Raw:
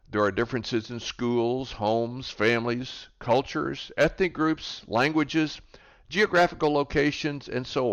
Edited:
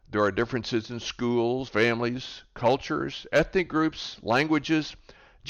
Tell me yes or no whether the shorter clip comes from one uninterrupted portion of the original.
no